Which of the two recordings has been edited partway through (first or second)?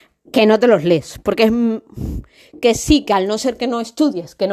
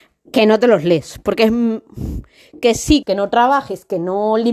second